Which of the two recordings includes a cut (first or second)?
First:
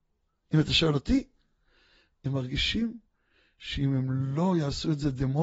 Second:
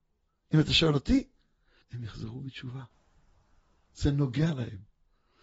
second